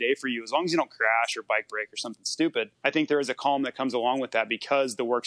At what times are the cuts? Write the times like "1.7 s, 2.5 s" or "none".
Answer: 2.7 s

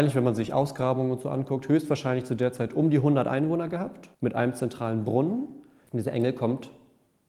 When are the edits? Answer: 4.1 s, 5.9 s

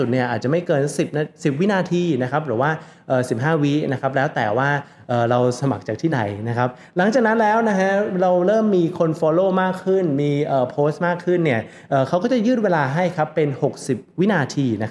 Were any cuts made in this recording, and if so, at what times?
none

